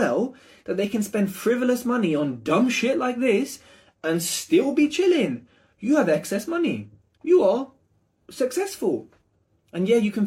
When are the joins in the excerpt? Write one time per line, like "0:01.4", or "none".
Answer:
none